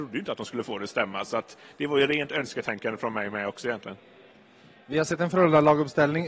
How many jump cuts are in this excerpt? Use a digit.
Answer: 0